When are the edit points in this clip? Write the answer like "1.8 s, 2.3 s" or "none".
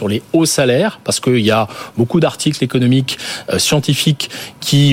none